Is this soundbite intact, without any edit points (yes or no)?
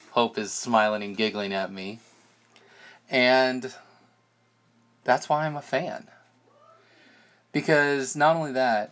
yes